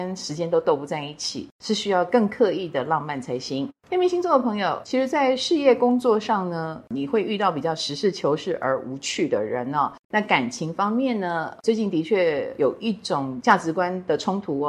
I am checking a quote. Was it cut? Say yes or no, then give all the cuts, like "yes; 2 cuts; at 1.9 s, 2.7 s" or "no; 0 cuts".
yes; 1 cut; at 10.0 s